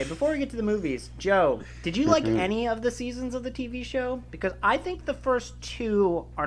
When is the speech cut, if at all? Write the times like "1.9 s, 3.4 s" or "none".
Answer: none

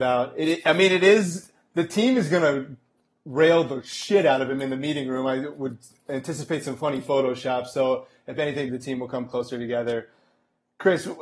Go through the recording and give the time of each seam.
8.7 s

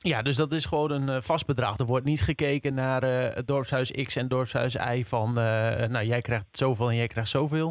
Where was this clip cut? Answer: none

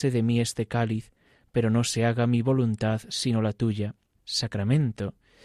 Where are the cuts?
4.2 s

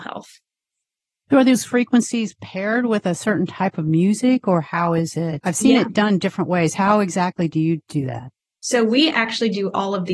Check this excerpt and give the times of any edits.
none

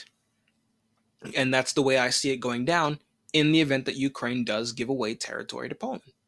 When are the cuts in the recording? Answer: none

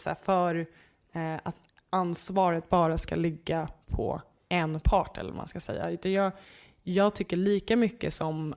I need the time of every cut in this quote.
none

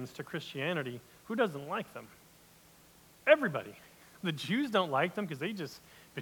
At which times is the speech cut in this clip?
none

